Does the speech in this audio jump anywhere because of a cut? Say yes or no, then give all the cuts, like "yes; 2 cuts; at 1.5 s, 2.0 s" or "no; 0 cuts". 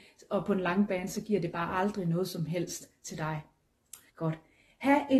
yes; 1 cut; at 4.1 s